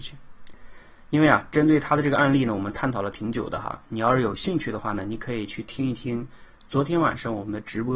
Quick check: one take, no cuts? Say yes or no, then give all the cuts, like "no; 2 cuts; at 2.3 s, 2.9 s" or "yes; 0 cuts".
yes; 0 cuts